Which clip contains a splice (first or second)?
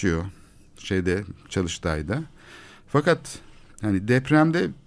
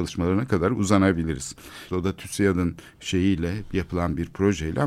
second